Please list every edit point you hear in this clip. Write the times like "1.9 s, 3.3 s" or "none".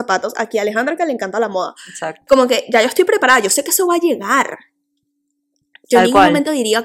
none